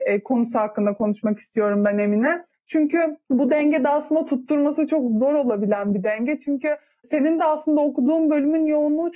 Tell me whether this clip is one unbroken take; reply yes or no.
yes